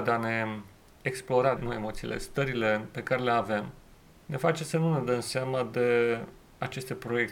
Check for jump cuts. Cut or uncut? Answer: cut